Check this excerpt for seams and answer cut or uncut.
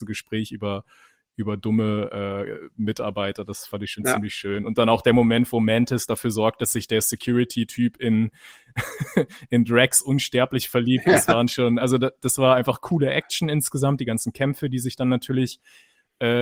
uncut